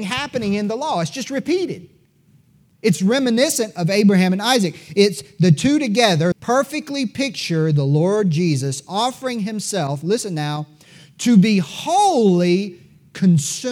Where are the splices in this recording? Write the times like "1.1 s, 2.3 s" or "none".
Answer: 6.3 s